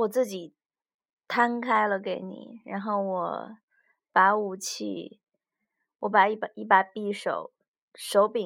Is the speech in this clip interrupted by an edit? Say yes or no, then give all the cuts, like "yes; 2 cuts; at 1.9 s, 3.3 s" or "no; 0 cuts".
no; 0 cuts